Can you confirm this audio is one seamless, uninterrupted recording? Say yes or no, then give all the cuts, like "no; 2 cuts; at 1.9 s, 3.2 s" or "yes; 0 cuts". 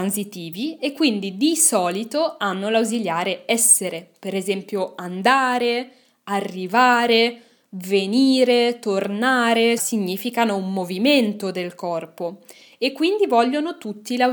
no; 1 cut; at 9.8 s